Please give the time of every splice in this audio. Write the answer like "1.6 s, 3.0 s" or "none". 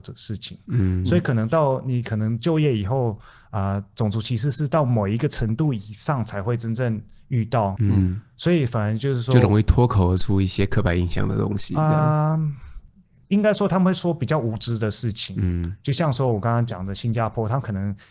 7.8 s